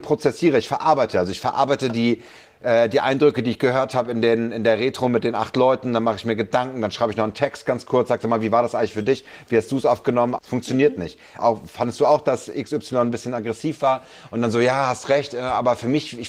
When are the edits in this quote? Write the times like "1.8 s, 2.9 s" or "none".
10.4 s, 11.4 s

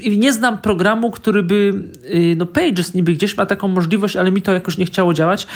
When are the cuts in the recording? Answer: none

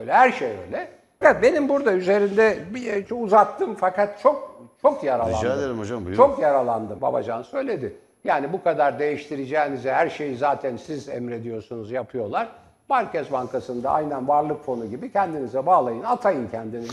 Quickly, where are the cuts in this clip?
1.2 s, 7.0 s

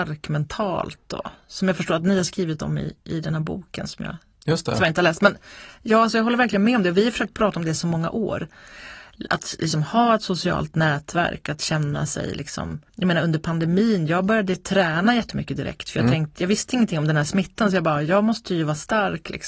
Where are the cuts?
12.9 s

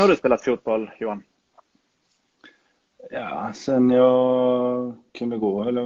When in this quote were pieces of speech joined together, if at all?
none

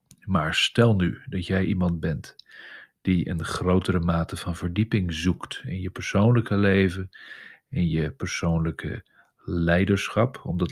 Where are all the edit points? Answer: none

